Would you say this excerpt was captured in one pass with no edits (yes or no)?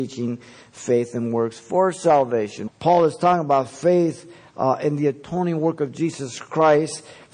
no